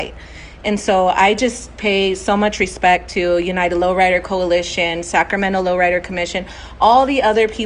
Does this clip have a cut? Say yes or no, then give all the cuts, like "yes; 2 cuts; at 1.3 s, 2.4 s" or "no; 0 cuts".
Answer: no; 0 cuts